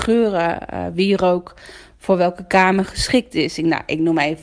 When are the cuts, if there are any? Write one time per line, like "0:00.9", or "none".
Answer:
none